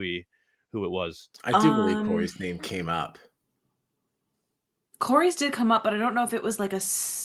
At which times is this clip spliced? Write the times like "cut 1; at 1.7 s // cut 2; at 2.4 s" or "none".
cut 1; at 1.3 s